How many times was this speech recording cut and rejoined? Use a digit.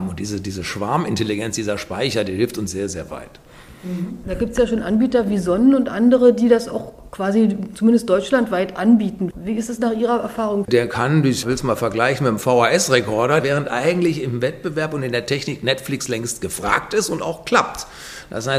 2